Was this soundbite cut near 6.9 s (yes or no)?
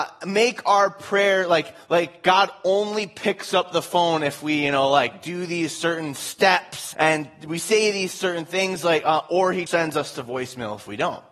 yes